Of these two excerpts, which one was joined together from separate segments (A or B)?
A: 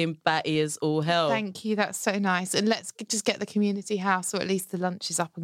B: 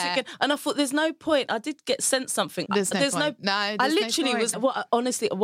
B